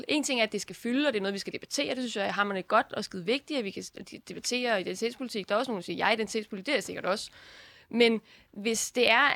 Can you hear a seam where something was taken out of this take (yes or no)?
no